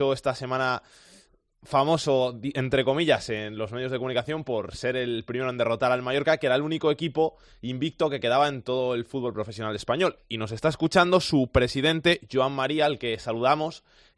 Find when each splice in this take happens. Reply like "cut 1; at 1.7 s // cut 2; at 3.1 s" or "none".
none